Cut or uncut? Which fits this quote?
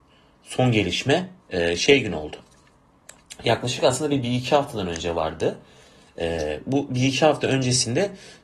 cut